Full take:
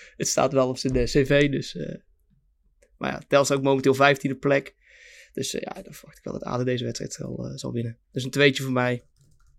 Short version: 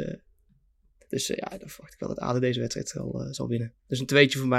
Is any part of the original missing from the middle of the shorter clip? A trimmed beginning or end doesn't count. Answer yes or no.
yes